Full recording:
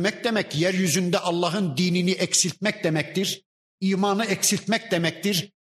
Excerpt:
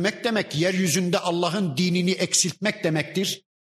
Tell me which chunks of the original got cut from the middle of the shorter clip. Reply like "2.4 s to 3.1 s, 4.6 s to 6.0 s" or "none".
none